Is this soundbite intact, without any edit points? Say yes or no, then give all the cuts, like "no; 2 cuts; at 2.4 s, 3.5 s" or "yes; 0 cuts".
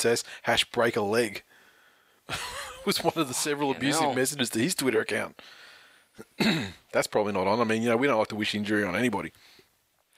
yes; 0 cuts